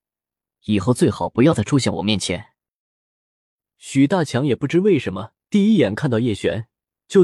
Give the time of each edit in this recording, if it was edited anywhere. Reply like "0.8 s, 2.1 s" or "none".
3.6 s, 5.4 s

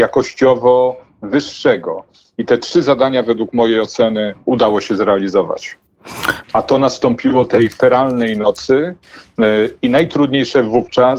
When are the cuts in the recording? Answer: 6.4 s

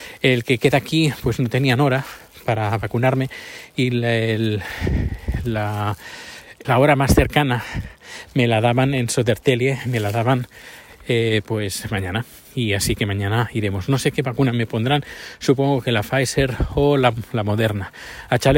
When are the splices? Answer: 6.6 s

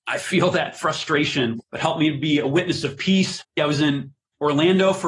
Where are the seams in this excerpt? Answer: 1.6 s, 3.4 s

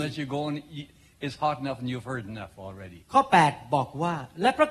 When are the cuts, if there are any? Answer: 3.0 s

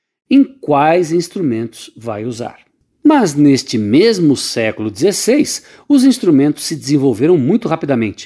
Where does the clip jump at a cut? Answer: 2.9 s

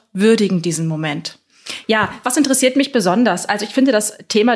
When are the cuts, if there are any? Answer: none

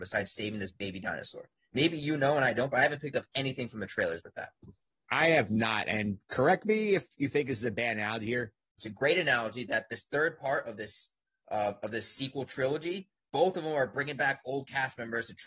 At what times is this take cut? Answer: 8.8 s

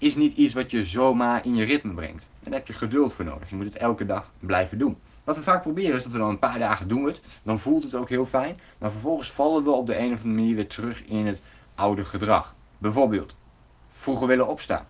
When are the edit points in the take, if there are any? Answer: 12.6 s

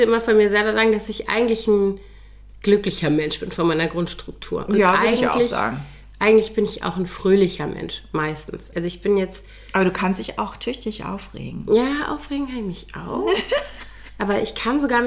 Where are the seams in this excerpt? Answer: 8.7 s

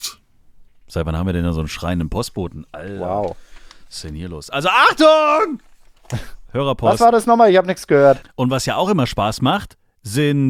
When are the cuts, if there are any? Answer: 8.2 s

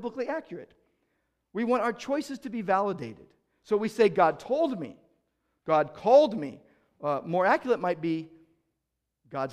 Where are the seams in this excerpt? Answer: none

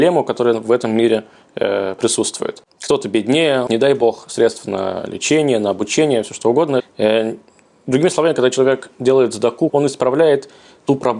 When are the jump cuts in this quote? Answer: 3.7 s, 6.8 s, 9.7 s

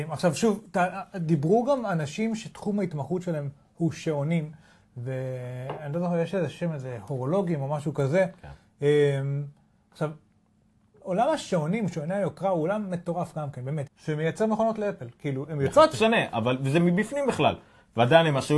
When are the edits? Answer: 13.9 s, 15.9 s

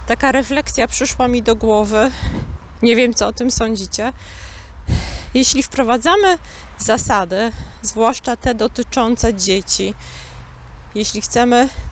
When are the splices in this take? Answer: none

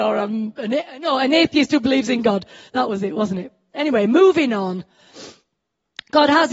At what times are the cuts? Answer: none

